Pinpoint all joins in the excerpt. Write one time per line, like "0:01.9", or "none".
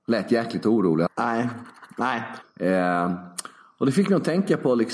0:01.1
0:02.4